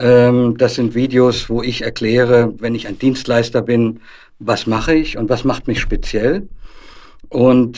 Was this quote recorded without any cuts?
yes; 0 cuts

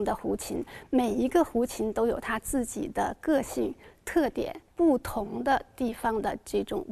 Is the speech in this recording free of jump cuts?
no; 1 cut; at 4.7 s

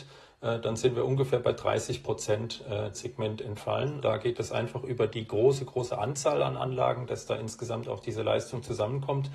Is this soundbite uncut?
no; 2 cuts; at 2.9 s, 4.0 s

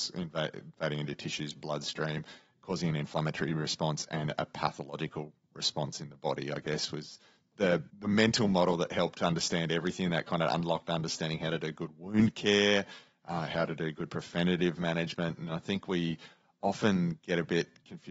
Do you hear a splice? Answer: yes; 1 cut; at 7.9 s

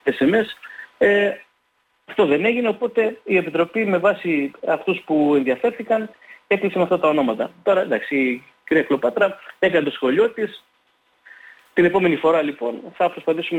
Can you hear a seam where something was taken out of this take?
no; 0 cuts

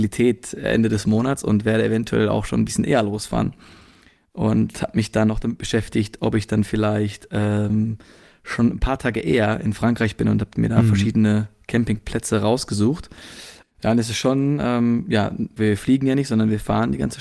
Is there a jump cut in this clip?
yes; 2 cuts; at 13.6 s, 15.6 s

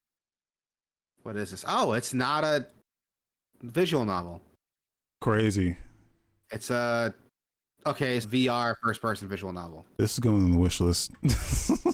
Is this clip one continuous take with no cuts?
no; 2 cuts; at 8.2 s, 9.9 s

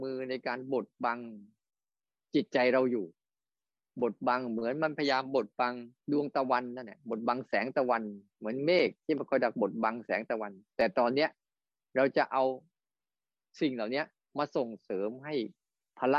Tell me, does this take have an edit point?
yes; 1 cut; at 6.0 s

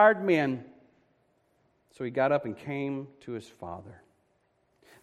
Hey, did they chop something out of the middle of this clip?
no; 0 cuts

